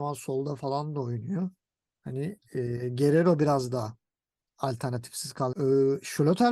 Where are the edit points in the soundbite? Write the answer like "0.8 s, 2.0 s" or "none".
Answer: 5.5 s